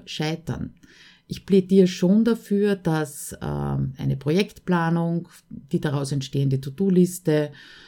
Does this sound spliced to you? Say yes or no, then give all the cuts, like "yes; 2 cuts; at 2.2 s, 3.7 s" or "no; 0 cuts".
no; 0 cuts